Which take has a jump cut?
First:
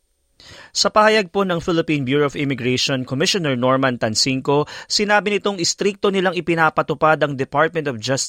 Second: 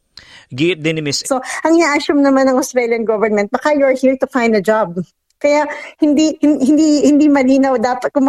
second; 1 cut; at 1.2 s

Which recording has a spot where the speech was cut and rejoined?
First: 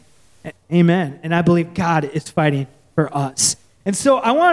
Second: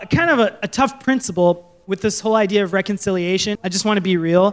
second; 1 cut; at 3.6 s

